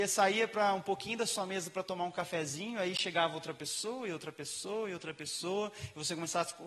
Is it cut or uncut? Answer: uncut